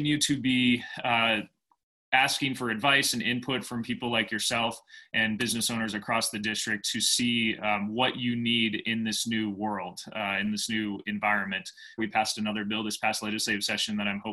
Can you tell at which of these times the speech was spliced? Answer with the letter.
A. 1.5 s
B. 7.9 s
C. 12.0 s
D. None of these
C